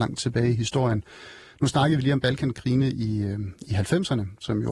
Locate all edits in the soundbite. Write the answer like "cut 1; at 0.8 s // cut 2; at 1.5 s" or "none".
none